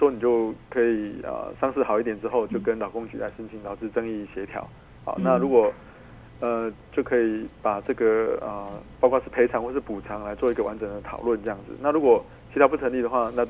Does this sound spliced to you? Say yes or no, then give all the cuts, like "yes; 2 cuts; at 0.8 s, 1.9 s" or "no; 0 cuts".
no; 0 cuts